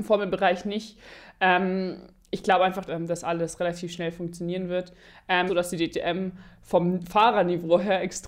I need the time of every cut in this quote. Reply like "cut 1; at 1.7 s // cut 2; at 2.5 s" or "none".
cut 1; at 2.8 s // cut 2; at 5.5 s